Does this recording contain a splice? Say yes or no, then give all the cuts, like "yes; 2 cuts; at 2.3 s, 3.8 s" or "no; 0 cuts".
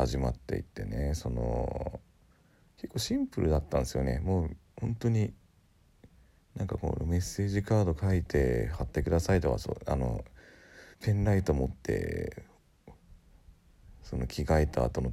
yes; 1 cut; at 10.9 s